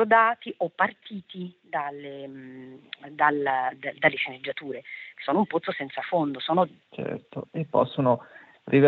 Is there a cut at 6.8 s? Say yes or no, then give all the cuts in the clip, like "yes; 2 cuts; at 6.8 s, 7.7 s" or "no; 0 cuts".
yes; 1 cut; at 6.8 s